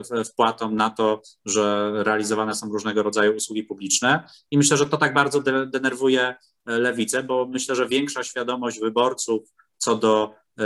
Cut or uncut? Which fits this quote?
uncut